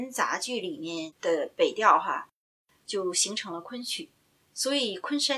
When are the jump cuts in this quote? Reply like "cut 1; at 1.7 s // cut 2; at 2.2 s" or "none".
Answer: none